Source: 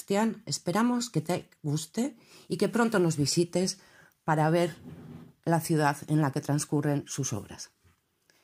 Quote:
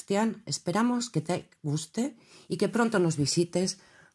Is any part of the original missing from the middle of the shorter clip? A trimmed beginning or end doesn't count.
no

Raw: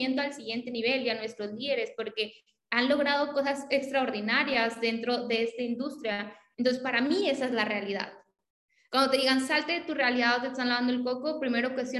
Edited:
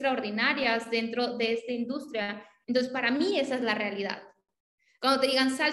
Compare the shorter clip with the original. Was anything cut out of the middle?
no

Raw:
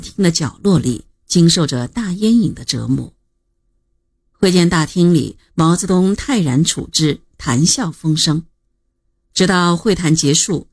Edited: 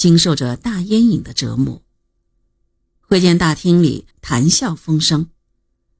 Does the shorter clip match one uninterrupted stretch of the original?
no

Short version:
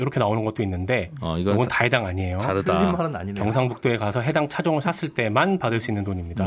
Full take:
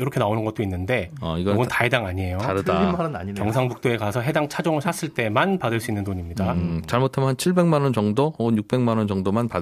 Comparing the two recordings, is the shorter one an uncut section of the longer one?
yes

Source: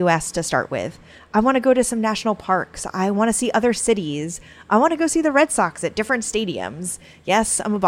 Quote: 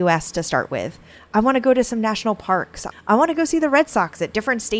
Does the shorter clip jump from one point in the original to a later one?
yes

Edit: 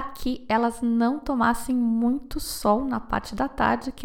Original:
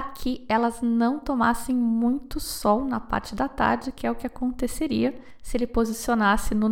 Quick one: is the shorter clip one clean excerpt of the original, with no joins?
yes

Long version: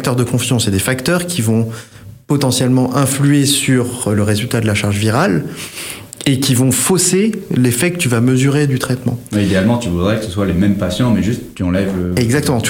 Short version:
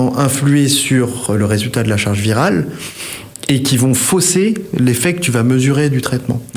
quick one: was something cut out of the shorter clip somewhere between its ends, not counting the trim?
no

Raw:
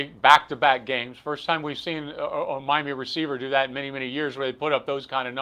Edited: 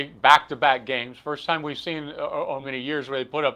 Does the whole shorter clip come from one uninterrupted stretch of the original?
no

